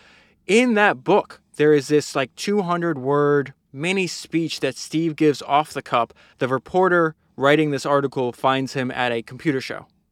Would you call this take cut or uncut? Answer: cut